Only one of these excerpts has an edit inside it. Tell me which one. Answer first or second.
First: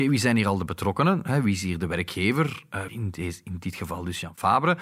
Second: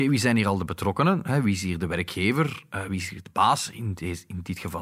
first